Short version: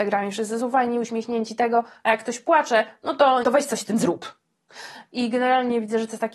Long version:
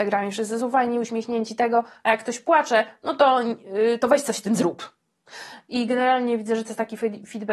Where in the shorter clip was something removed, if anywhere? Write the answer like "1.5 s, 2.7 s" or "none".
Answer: 3.4 s